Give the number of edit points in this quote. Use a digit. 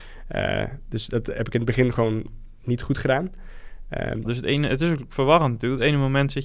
1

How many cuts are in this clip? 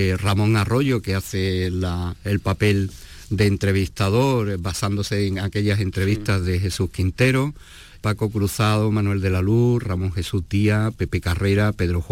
1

